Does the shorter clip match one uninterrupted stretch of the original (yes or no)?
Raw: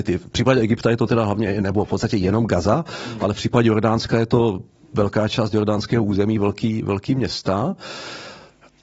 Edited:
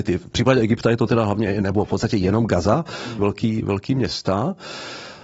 no